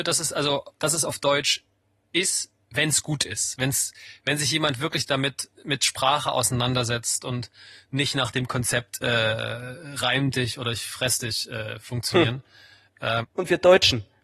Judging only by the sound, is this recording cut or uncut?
cut